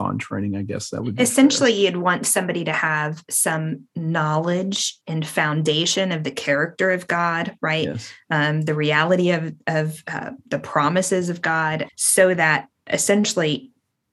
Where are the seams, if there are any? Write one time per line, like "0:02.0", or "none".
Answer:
0:11.9